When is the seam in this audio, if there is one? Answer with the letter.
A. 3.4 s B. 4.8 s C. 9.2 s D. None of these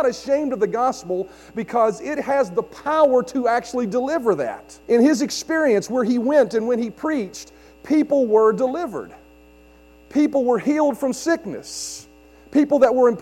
B